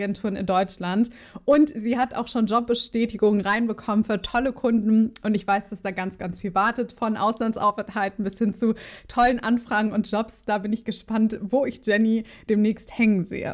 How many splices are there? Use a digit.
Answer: 0